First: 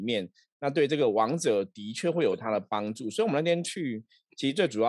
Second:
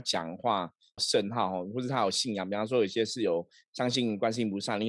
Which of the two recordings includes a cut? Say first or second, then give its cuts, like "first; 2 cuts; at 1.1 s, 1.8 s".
second; 1 cut; at 1.0 s